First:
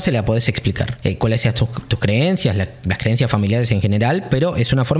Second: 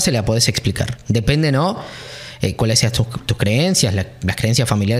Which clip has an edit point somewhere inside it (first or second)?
first